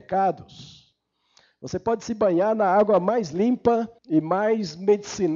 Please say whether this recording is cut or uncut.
cut